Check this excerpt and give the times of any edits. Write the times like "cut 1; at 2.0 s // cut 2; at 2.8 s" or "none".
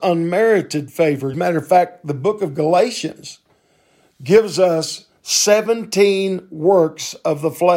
cut 1; at 1.3 s